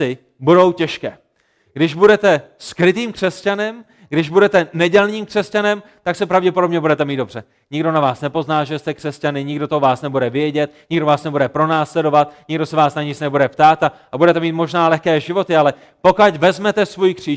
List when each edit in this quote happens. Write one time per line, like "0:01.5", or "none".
none